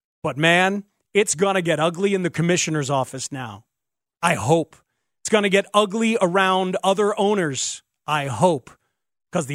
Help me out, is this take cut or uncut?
uncut